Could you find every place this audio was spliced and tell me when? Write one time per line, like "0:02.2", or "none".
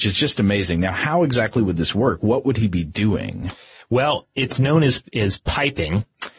none